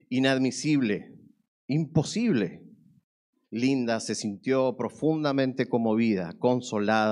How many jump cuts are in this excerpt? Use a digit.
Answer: 2